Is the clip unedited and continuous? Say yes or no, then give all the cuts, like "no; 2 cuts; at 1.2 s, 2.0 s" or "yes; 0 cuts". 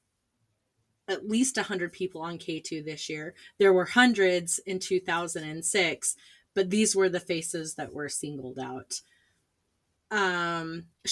no; 1 cut; at 10.0 s